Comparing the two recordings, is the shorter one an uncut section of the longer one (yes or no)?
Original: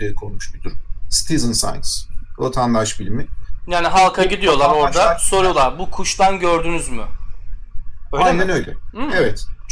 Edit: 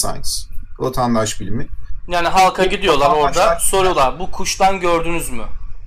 yes